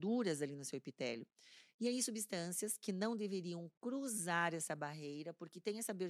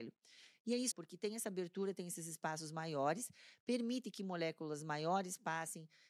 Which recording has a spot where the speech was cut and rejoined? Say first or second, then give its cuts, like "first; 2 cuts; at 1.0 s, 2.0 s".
second; 1 cut; at 0.9 s